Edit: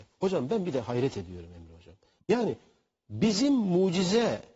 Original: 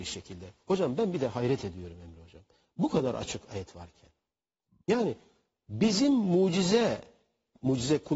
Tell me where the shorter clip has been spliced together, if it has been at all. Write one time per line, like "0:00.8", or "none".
0:02.2

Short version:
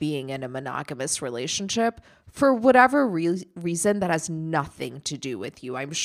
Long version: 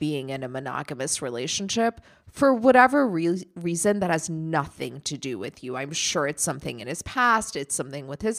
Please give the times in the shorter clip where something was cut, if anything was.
none

